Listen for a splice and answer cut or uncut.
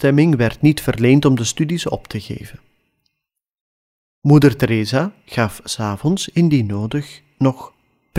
uncut